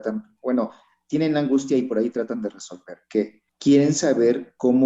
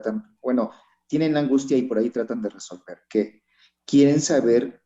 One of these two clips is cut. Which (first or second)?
first